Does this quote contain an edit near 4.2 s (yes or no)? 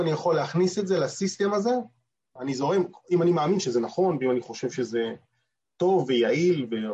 no